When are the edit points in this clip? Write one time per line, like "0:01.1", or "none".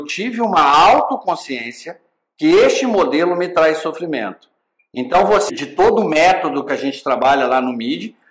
0:05.5